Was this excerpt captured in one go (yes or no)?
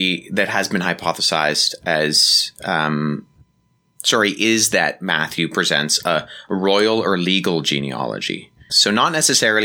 no